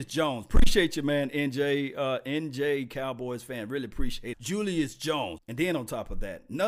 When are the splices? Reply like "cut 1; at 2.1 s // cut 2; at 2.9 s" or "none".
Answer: cut 1; at 4.3 s // cut 2; at 5.4 s